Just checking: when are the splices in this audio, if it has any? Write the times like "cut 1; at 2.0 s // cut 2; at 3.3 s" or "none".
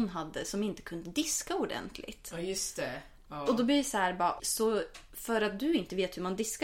cut 1; at 4.4 s